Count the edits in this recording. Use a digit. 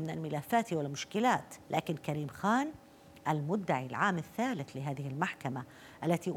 1